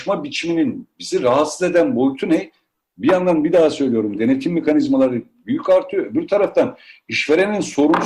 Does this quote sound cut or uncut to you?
uncut